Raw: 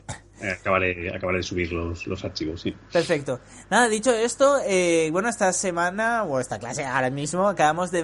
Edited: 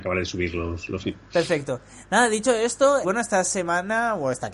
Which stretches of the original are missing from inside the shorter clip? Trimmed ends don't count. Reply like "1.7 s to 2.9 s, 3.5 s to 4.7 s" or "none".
2.2 s to 2.6 s, 4.6 s to 5.1 s